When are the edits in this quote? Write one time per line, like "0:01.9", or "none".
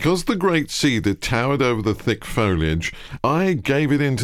0:03.2